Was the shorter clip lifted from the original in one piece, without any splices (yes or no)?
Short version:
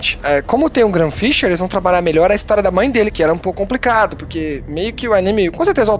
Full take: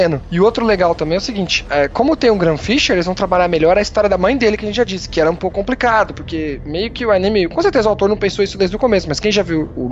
no